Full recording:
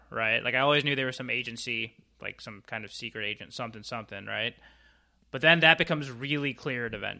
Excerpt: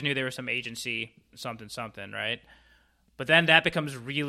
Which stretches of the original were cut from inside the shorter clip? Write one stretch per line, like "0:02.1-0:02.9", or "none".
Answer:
0:02.1-0:03.5